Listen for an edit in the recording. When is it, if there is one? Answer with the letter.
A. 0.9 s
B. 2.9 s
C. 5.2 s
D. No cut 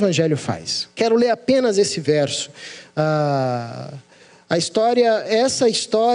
A